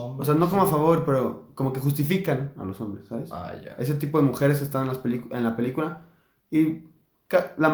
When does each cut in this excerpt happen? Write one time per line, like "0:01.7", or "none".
none

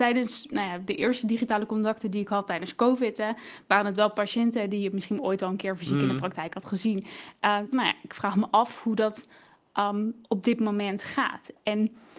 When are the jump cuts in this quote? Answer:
0:07.7
0:10.2

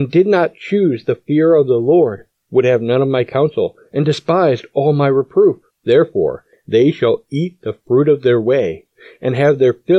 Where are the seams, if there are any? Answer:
none

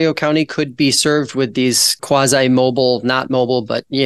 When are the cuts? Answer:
0:02.0

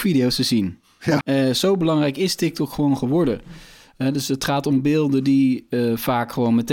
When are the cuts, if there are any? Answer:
0:01.2

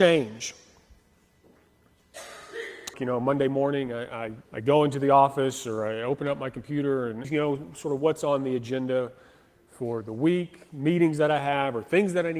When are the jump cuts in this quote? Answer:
0:02.9
0:04.4
0:07.2

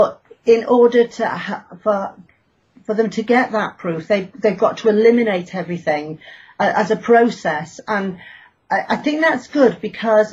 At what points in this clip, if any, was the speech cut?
none

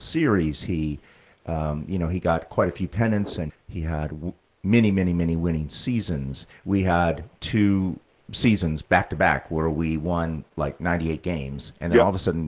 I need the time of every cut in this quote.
0:03.5

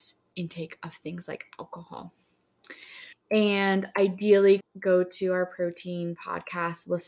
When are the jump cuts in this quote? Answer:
0:03.1
0:04.6

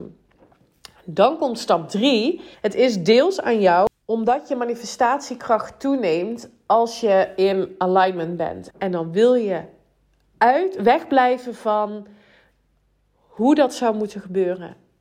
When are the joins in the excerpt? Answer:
0:02.5
0:08.7

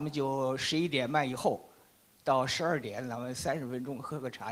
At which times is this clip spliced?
none

